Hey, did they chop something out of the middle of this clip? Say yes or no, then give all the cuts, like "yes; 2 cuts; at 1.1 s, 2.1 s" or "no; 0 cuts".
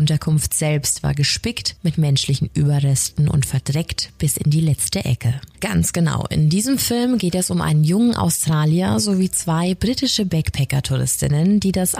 yes; 1 cut; at 5.5 s